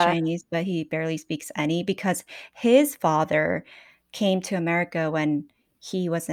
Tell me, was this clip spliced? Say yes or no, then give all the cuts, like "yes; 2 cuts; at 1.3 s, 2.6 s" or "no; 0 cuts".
no; 0 cuts